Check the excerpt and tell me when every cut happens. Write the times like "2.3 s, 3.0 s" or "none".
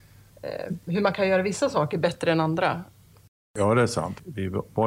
none